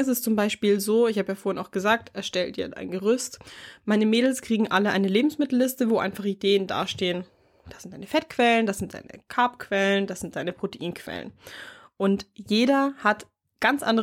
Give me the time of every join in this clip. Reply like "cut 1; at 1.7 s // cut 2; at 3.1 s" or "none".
none